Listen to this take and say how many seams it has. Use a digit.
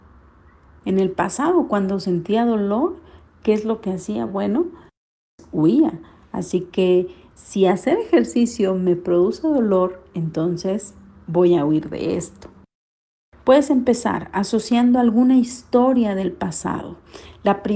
0